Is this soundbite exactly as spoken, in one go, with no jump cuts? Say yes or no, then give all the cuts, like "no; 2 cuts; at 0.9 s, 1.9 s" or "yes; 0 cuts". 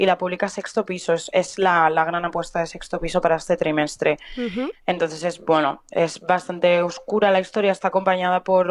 no; 1 cut; at 4.7 s